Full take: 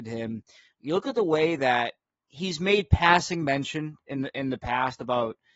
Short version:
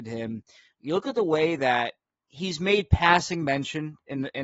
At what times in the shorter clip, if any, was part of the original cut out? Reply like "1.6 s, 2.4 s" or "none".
none